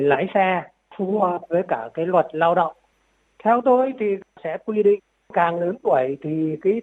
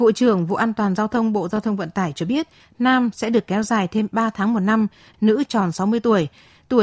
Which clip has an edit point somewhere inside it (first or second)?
second